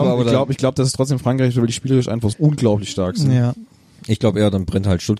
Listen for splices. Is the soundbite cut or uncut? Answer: cut